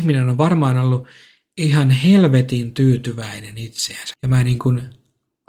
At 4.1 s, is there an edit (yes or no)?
yes